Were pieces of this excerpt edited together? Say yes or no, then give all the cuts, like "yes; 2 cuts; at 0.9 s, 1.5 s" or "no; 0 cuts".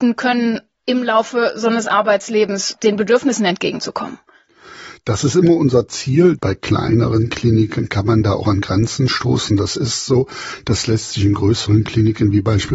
no; 0 cuts